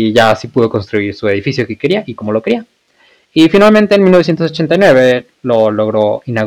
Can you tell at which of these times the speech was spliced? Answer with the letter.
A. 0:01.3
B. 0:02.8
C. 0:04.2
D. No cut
D